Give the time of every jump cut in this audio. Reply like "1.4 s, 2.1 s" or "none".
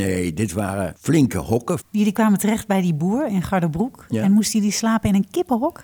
1.8 s